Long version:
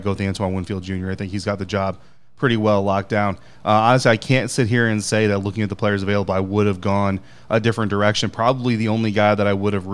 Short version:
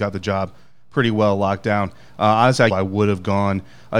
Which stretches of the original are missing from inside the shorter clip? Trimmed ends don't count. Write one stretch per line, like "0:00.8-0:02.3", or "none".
0:04.1-0:06.3